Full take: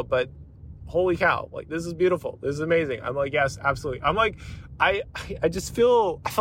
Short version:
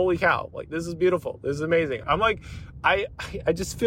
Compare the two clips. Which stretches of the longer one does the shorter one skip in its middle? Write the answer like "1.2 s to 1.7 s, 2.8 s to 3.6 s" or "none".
3.0 s to 4.0 s